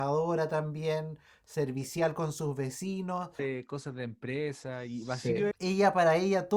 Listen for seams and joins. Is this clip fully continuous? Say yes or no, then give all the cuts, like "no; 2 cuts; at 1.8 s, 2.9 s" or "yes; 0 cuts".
no; 2 cuts; at 3.4 s, 5.5 s